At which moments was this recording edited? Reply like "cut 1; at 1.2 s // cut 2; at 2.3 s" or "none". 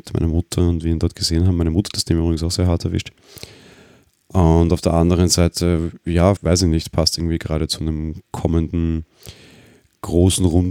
cut 1; at 6.4 s